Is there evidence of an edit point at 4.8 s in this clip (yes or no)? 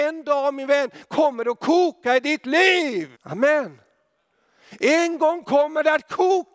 no